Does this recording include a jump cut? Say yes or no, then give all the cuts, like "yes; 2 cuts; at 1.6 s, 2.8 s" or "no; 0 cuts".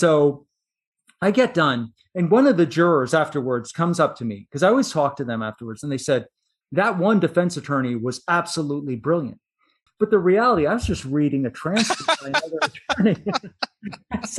yes; 2 cuts; at 6.6 s, 9.9 s